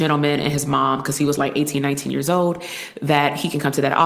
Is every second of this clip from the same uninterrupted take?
yes; 0 cuts

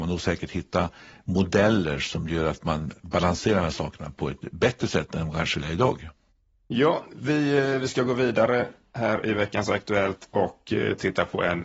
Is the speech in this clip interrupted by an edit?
no; 0 cuts

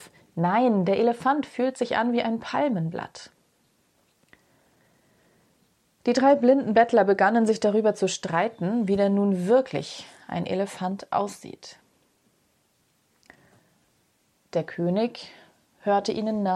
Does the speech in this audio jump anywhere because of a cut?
no; 0 cuts

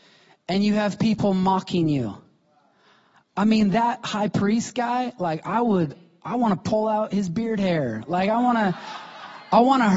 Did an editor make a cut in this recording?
no; 0 cuts

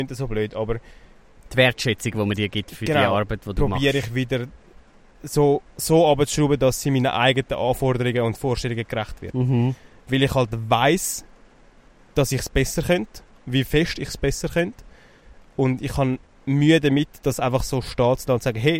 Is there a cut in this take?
yes; 1 cut; at 5.7 s

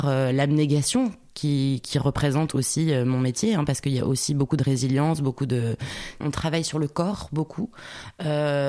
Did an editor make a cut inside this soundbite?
yes; 1 cut; at 6.2 s

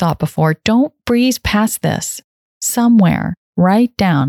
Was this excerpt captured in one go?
yes; 0 cuts

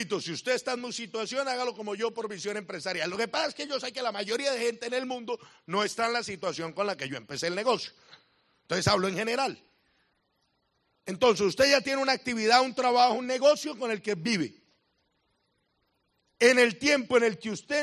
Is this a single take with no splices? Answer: no; 1 cut; at 13.1 s

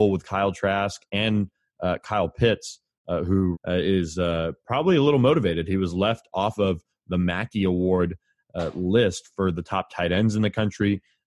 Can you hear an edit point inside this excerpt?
yes; 1 cut; at 3.5 s

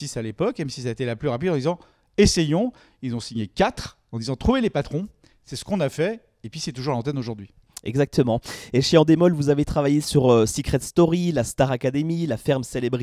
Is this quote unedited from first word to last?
yes; 0 cuts

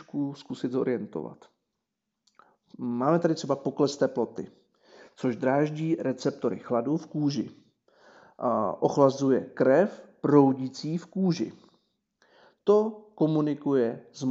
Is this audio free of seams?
yes; 0 cuts

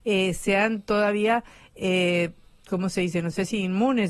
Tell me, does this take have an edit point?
no; 0 cuts

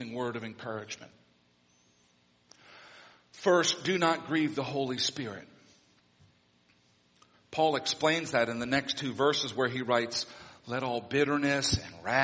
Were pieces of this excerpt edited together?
yes; 1 cut; at 7.3 s

